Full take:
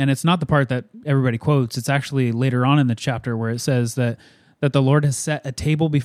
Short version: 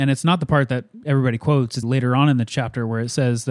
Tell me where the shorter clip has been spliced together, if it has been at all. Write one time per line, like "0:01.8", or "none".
0:01.8

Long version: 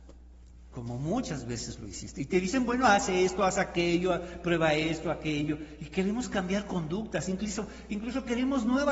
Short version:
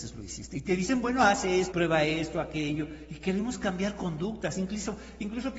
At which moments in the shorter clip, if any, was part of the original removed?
0:01.7

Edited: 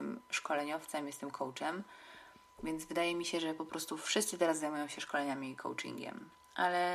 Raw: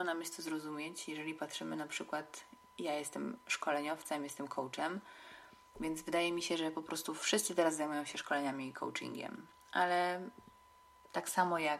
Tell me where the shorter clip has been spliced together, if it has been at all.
none

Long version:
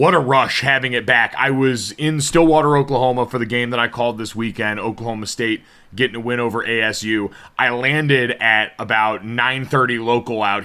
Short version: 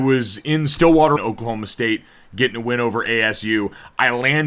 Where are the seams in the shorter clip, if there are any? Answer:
0:01.2

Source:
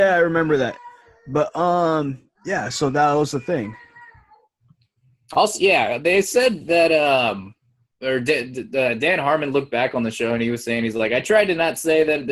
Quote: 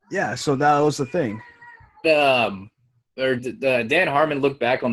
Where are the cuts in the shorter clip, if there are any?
0:02.0
0:03.4

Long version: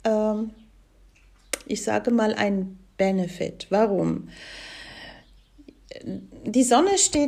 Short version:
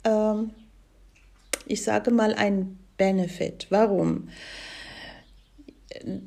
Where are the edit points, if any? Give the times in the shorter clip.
none

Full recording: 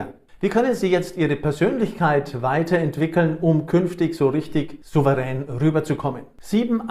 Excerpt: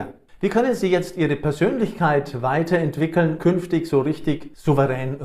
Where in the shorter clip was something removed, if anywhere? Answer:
0:03.4

